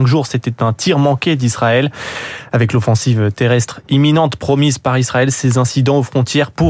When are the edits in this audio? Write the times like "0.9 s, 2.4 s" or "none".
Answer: none